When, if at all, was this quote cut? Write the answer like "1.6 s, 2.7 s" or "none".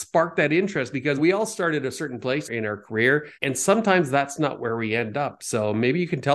1.2 s, 3.3 s